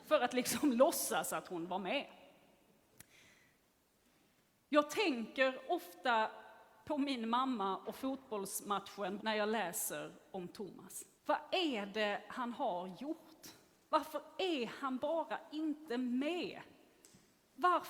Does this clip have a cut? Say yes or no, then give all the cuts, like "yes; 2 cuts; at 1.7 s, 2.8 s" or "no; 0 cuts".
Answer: yes; 2 cuts; at 9.2 s, 11.2 s